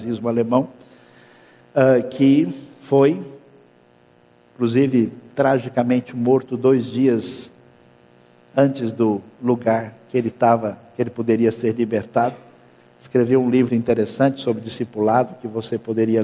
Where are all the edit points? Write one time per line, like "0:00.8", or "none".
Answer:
0:13.7